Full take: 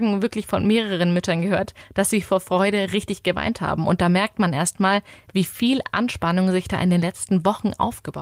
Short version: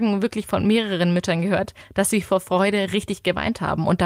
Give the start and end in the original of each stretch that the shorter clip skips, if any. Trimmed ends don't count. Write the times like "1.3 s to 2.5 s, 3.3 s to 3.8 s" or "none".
none